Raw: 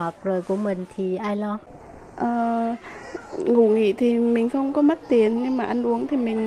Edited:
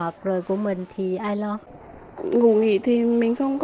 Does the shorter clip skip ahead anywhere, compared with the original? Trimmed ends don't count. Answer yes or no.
yes